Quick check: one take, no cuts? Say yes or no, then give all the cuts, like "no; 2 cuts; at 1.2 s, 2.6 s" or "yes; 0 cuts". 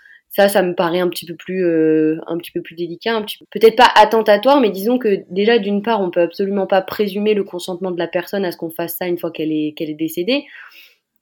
yes; 0 cuts